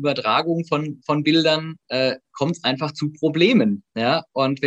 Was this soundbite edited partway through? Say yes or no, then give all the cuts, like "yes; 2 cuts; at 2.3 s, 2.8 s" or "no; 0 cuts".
no; 0 cuts